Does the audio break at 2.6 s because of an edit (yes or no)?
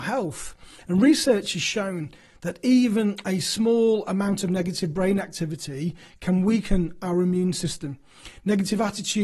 no